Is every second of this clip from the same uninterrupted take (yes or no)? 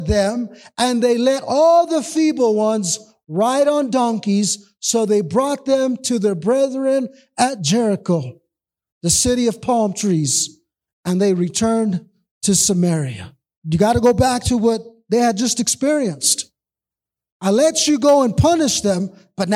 no